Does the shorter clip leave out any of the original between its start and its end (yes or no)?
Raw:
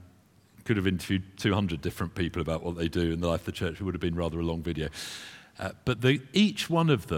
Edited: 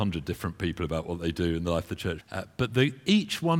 yes